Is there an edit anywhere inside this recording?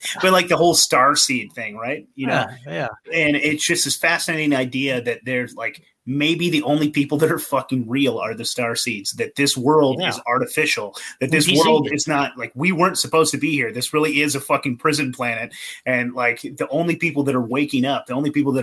no; 0 cuts

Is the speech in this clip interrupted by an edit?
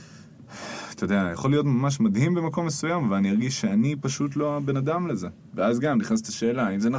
no; 0 cuts

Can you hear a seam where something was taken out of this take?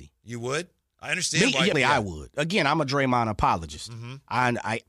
yes; 1 cut; at 1.7 s

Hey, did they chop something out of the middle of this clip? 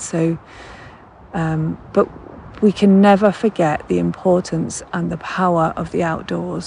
no; 0 cuts

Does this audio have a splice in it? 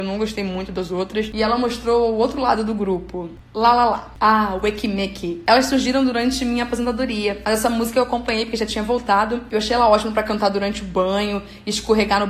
no; 0 cuts

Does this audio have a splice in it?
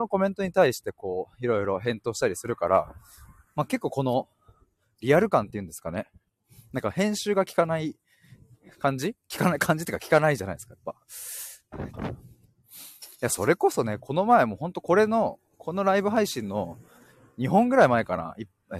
yes; 1 cut; at 11.9 s

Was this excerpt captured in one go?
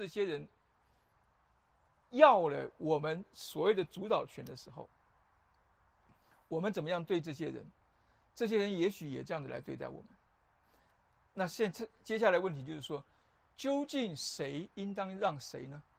yes; 0 cuts

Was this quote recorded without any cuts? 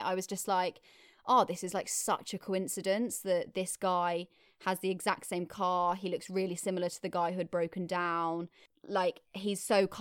yes; 0 cuts

